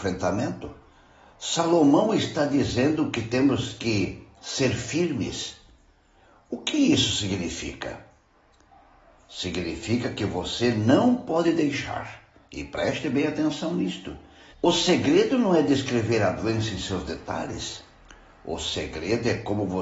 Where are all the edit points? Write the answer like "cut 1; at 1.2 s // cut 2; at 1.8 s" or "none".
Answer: cut 1; at 14.5 s